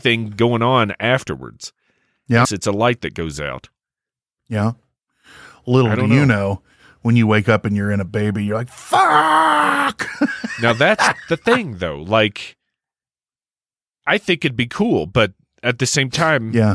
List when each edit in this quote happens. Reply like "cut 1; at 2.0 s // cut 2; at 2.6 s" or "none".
cut 1; at 2.4 s